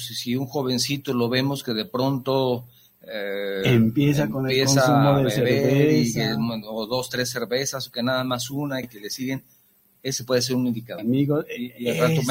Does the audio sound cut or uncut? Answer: cut